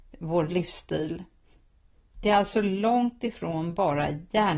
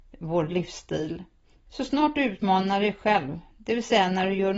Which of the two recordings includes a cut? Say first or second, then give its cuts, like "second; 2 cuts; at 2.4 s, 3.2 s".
second; 1 cut; at 1.7 s